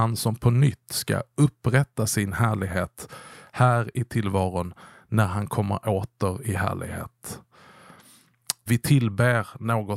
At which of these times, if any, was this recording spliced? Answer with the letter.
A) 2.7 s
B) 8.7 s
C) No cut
B